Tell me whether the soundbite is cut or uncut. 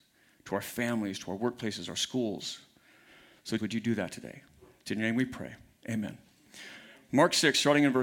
cut